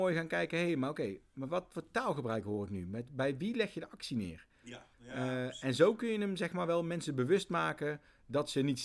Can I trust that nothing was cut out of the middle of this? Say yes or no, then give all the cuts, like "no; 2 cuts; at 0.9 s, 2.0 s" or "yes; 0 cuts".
no; 1 cut; at 4.9 s